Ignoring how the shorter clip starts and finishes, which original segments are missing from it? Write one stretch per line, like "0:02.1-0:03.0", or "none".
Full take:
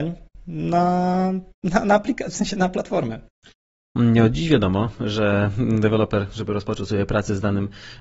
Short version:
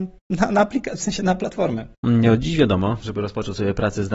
0:03.3-0:03.9
0:04.9-0:06.3